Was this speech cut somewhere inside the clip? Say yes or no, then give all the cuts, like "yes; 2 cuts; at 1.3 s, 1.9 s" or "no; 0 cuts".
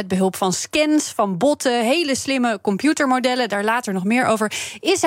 no; 0 cuts